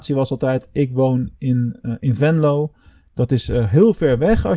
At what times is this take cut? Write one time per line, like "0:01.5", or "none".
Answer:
none